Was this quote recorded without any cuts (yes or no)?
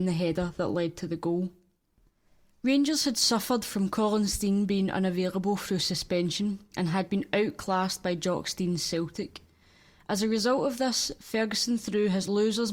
yes